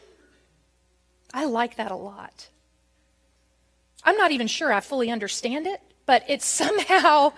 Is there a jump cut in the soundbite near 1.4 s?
no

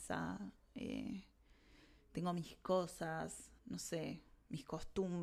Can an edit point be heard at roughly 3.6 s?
yes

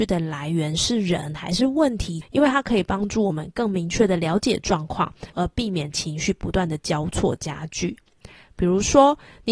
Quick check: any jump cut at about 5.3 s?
yes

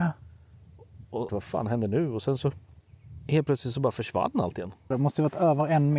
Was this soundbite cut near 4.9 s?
yes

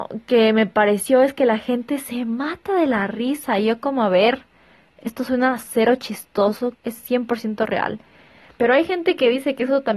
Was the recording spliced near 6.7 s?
yes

